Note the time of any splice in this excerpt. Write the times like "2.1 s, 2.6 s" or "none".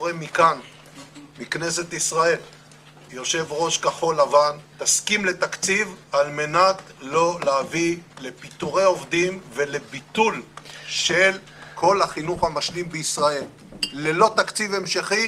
3.1 s, 4.7 s